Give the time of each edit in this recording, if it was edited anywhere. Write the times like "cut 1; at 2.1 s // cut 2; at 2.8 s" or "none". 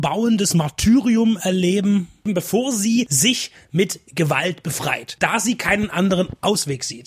none

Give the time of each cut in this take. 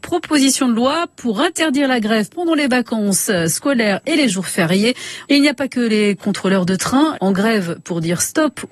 cut 1; at 5.3 s // cut 2; at 7.2 s

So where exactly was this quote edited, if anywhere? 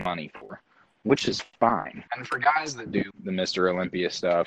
cut 1; at 2.1 s // cut 2; at 3.1 s

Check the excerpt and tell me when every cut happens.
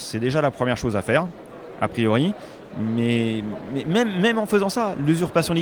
none

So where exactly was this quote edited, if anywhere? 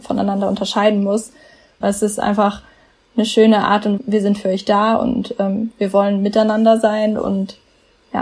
cut 1; at 1.8 s // cut 2; at 4.0 s

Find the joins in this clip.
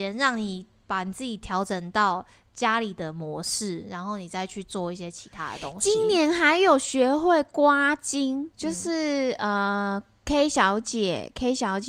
none

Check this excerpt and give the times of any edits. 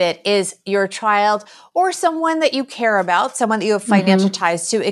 none

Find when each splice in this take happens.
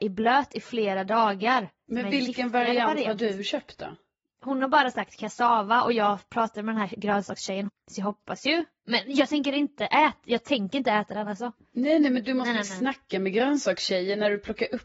cut 1; at 7.7 s

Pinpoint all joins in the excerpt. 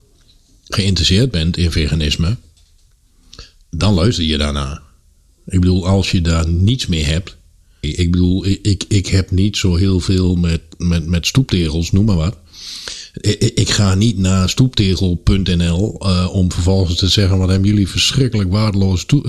cut 1; at 7.8 s

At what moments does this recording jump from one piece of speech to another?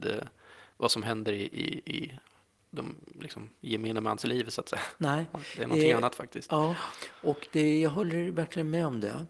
none

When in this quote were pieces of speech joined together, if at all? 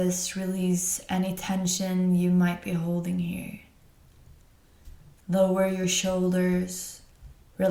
cut 1; at 5.2 s

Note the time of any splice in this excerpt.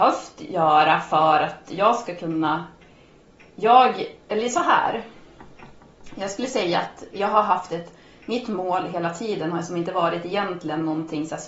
cut 1; at 7.1 s

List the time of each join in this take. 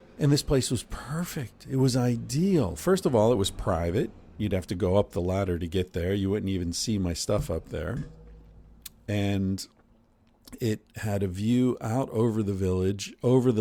none

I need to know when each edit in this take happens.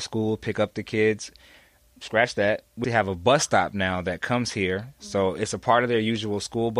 cut 1; at 2.8 s

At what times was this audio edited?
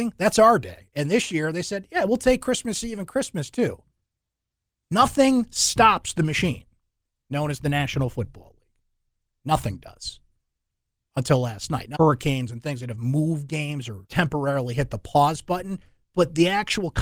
cut 1; at 11.9 s // cut 2; at 14.0 s

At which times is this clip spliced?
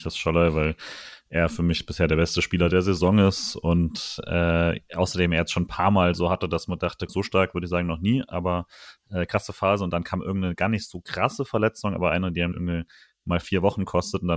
cut 1; at 7.1 s // cut 2; at 12.5 s

